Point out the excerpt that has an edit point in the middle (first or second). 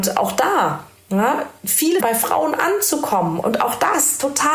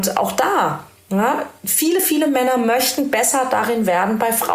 first